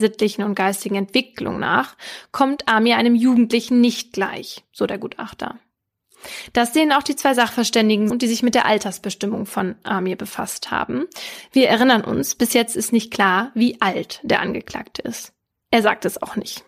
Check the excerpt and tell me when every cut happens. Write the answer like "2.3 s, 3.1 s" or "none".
8.1 s

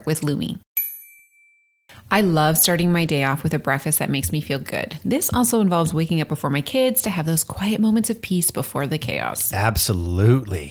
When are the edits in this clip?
none

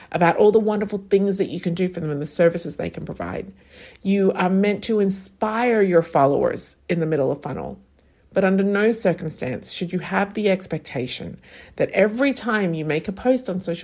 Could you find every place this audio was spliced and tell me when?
none

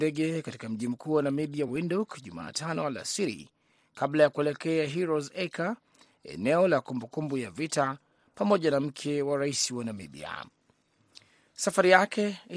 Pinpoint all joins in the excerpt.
none

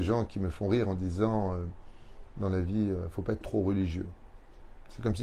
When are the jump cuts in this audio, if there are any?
3.4 s

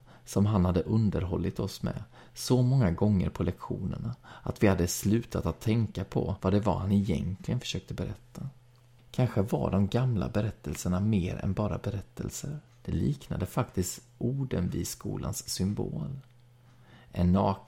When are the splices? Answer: 12.7 s

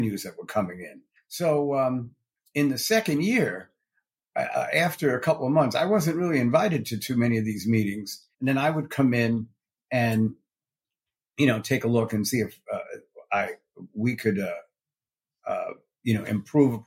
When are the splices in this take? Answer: 1.2 s, 8.3 s

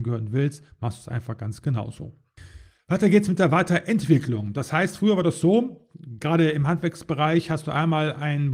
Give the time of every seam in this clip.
none

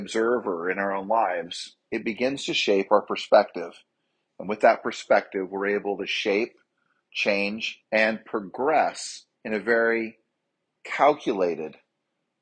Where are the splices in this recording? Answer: 7.8 s, 9.3 s

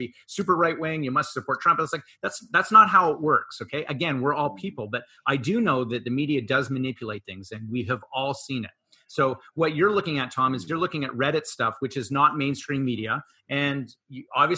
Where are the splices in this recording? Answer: none

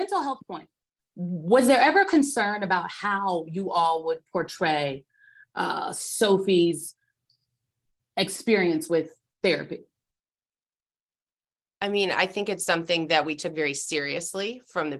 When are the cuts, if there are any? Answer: 1.0 s

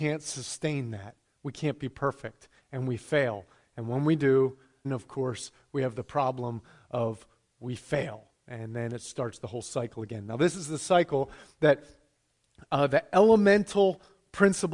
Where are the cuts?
4.8 s

